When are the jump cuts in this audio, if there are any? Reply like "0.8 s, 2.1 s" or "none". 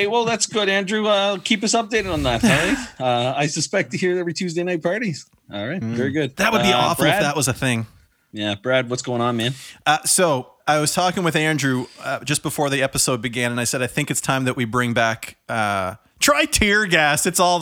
none

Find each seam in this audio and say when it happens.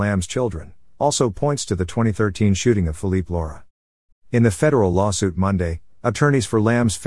4.1 s

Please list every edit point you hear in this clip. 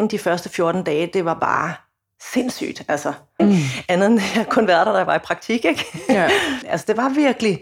3.4 s, 6.6 s

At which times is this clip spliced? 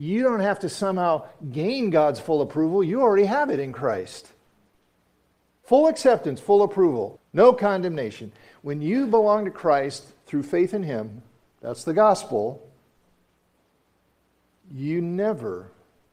7.2 s

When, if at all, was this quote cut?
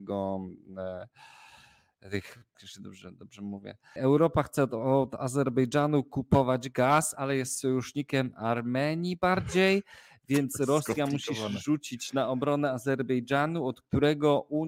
2.5 s, 4.0 s

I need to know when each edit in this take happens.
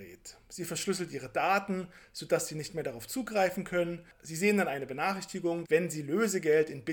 5.6 s

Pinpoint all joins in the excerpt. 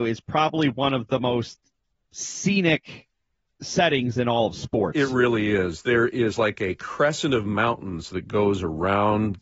none

